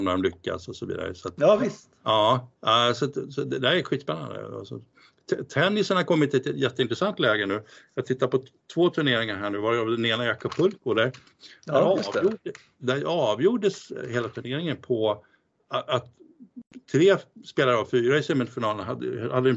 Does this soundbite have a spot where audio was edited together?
no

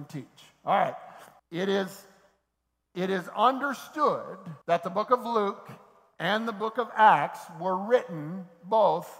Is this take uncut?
no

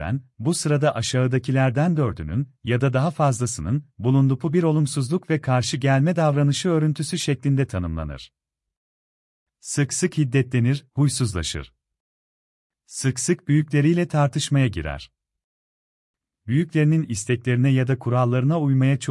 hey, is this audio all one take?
yes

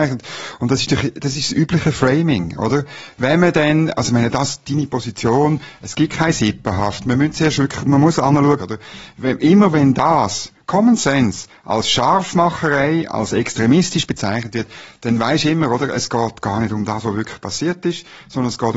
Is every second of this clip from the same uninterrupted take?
no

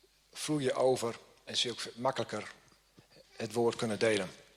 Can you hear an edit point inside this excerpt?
no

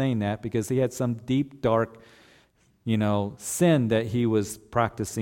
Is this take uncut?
yes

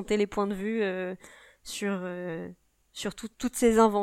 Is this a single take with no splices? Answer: yes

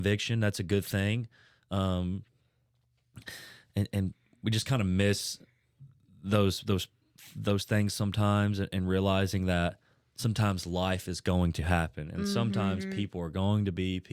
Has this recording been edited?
no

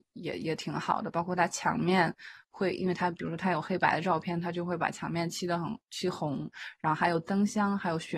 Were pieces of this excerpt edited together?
no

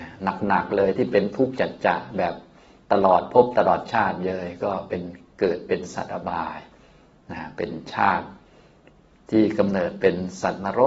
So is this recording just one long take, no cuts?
yes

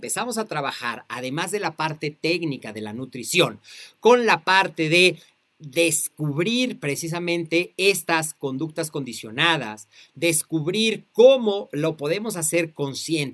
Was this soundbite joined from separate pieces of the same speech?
no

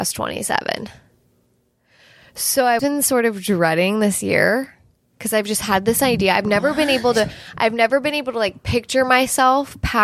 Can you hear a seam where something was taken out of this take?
yes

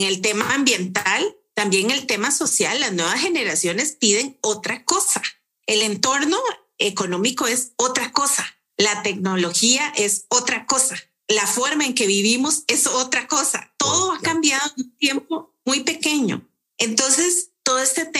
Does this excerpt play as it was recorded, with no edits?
yes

